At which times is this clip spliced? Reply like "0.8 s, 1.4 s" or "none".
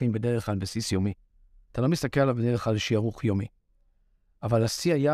1.7 s